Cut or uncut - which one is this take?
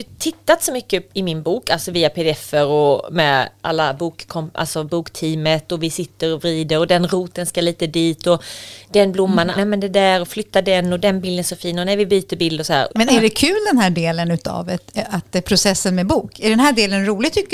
cut